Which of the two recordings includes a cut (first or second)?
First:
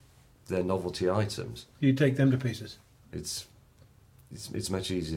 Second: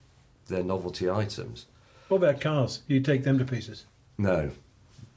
first